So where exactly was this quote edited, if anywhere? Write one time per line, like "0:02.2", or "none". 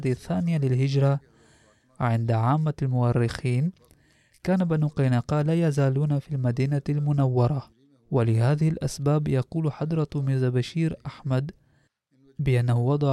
none